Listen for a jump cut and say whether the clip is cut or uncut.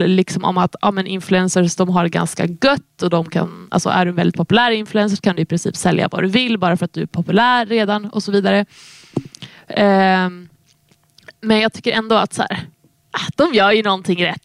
uncut